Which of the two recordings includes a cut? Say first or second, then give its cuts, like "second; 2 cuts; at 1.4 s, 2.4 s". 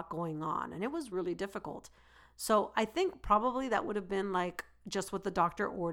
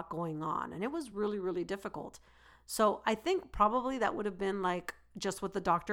first; 1 cut; at 1.1 s